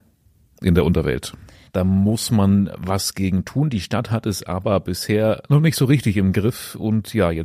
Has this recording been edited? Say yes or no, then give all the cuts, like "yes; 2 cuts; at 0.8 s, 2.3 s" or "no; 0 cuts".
yes; 1 cut; at 1.7 s